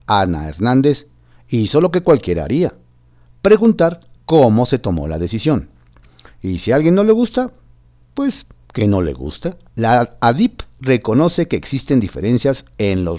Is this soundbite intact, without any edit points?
no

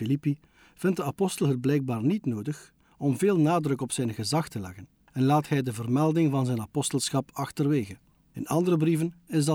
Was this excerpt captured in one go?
yes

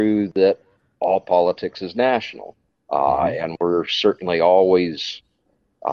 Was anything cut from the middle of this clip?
yes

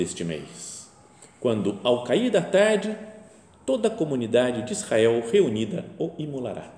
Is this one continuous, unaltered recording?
yes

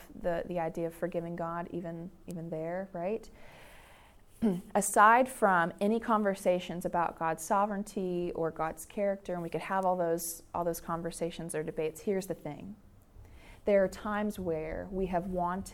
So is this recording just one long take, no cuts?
yes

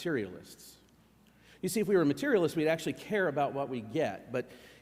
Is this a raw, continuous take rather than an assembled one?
yes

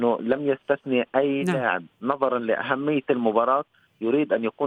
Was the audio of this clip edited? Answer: no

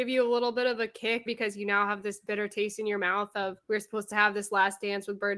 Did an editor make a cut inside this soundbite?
yes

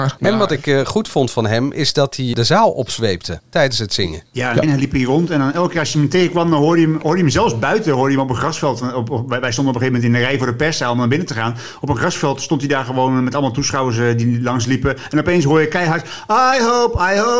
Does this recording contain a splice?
yes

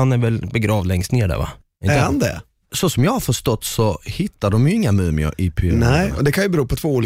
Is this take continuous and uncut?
yes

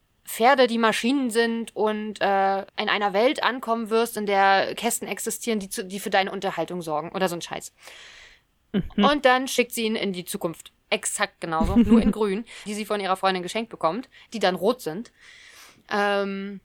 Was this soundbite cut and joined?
yes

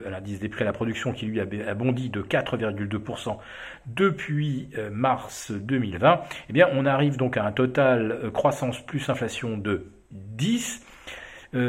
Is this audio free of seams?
yes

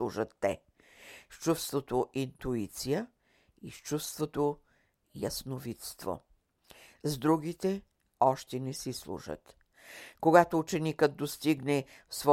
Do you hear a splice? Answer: no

